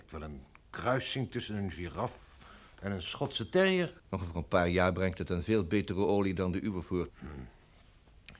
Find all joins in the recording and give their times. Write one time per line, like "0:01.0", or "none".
0:04.0
0:07.1